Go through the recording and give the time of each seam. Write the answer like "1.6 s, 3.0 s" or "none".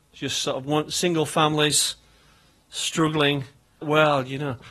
3.8 s